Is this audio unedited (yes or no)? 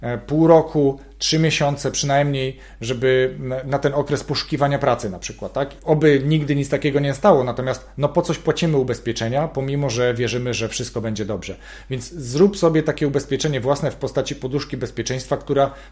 no